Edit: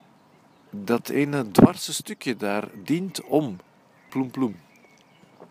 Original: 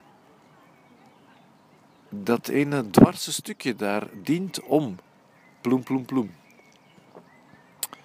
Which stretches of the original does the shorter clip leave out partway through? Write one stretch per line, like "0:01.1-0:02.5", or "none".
0:05.5-0:05.8